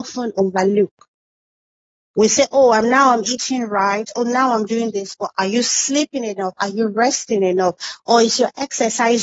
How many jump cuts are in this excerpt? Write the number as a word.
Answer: zero